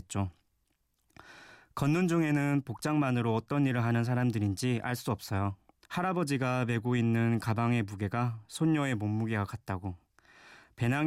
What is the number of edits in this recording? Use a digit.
1